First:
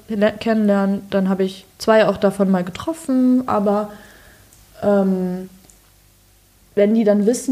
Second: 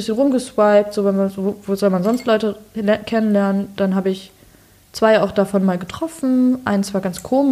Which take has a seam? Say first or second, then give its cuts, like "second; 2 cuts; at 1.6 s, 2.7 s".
first; 2 cuts; at 1.7 s, 3.5 s